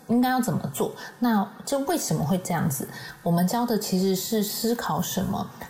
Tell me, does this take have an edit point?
no; 0 cuts

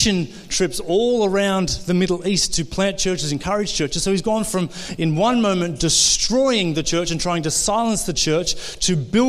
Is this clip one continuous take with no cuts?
yes; 0 cuts

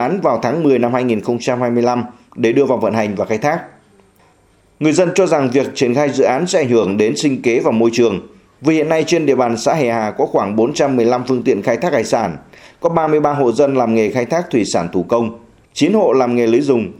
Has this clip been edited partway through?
no; 0 cuts

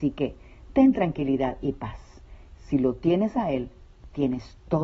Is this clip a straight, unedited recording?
yes; 0 cuts

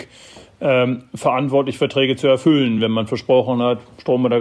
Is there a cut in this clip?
no; 0 cuts

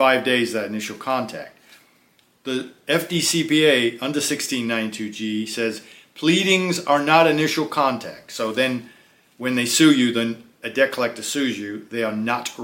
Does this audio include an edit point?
no; 0 cuts

